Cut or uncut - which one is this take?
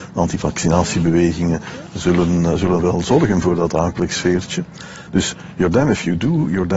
cut